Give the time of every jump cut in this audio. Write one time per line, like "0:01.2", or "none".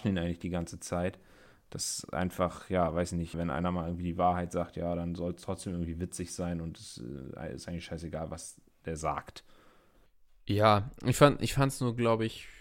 0:01.6
0:03.3